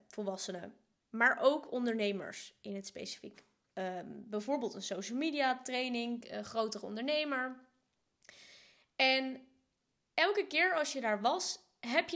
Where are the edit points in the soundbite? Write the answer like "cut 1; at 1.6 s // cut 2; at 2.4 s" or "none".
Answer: cut 1; at 3.7 s // cut 2; at 6.2 s